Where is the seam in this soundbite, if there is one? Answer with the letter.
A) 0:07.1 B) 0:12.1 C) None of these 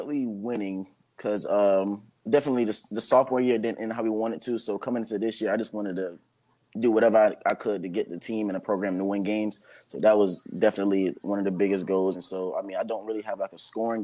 B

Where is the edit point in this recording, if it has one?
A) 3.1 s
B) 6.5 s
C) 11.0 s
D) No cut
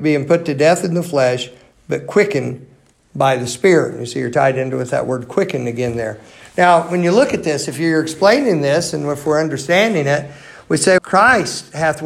C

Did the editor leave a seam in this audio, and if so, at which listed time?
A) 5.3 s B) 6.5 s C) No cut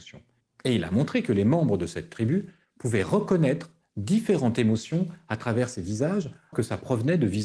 B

